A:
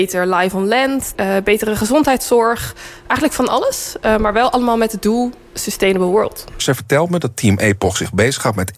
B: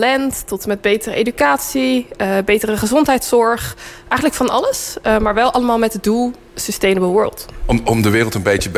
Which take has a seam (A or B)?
A